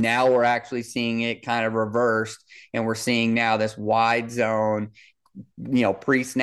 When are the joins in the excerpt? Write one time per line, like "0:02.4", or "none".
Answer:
none